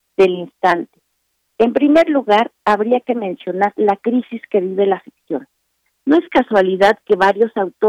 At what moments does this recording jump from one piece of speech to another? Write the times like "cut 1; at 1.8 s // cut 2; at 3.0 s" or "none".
none

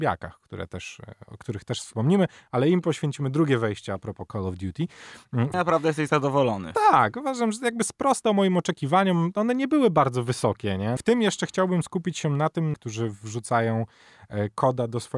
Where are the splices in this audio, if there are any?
cut 1; at 5.5 s // cut 2; at 11.0 s // cut 3; at 12.7 s

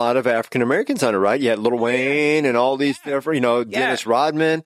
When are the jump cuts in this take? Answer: none

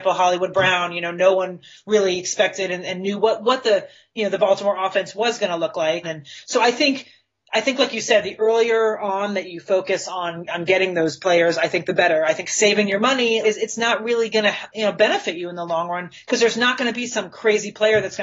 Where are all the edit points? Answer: cut 1; at 6.0 s // cut 2; at 13.4 s

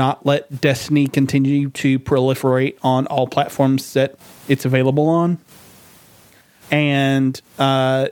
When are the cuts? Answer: cut 1; at 6.6 s

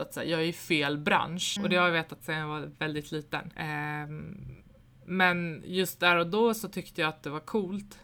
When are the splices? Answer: cut 1; at 1.6 s // cut 2; at 3.5 s

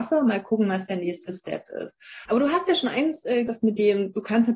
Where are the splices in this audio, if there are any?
cut 1; at 2.3 s // cut 2; at 3.5 s

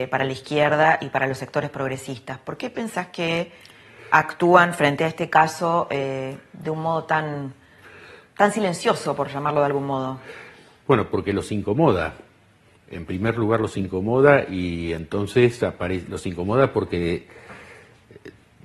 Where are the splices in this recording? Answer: none

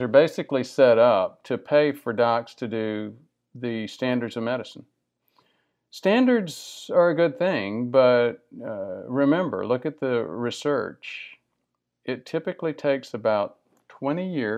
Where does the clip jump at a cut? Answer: none

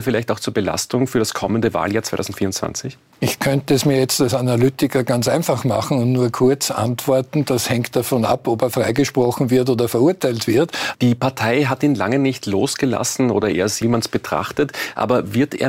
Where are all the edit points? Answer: cut 1; at 10.9 s // cut 2; at 13.8 s

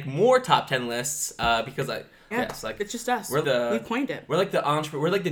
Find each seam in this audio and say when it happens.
cut 1; at 2.3 s // cut 2; at 3.4 s

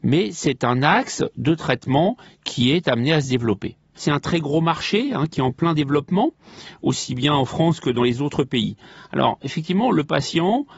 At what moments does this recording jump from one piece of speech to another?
cut 1; at 3.9 s

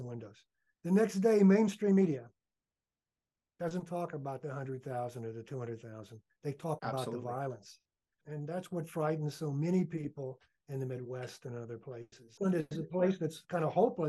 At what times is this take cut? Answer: cut 1; at 8.2 s // cut 2; at 12.4 s

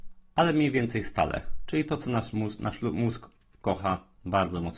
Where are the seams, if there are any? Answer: none

